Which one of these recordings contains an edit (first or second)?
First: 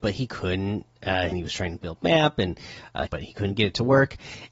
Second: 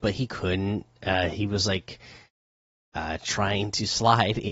first